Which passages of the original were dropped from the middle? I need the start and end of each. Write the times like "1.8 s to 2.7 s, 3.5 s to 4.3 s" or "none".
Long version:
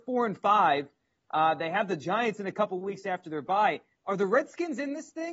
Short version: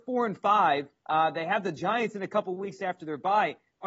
1.0 s to 1.2 s